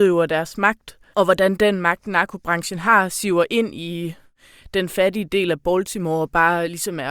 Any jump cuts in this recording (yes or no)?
yes